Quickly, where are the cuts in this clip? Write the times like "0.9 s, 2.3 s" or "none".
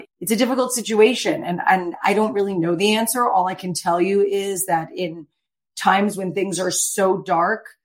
none